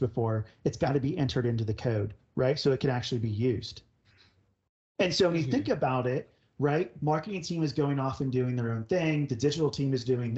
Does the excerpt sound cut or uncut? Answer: uncut